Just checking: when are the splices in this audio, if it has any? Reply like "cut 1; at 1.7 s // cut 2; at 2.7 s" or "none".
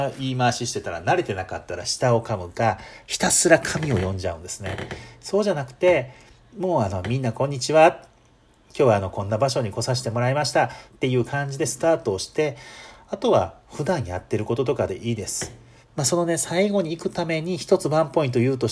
cut 1; at 10.9 s // cut 2; at 15.8 s